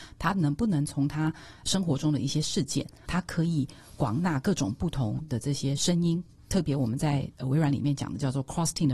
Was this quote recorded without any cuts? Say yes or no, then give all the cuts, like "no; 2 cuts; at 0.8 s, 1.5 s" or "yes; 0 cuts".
no; 1 cut; at 3.0 s